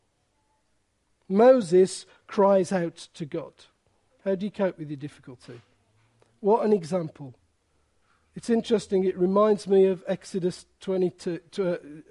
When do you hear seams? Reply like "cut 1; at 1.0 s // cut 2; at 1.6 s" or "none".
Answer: none